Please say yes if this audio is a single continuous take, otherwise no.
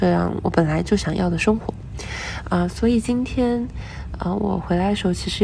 yes